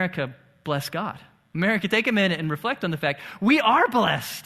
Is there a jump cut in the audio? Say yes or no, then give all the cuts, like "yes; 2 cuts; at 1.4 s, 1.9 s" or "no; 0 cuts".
no; 0 cuts